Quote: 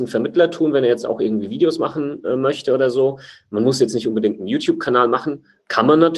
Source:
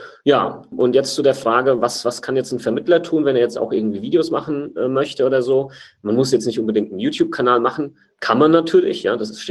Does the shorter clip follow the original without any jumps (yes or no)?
yes